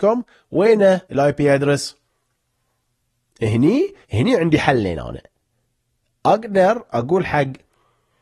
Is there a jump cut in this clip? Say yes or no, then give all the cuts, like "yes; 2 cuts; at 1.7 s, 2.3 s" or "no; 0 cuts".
yes; 2 cuts; at 1.0 s, 4.0 s